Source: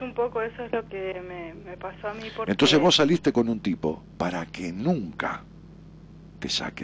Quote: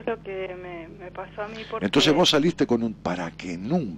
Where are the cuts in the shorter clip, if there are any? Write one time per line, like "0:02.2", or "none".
0:03.0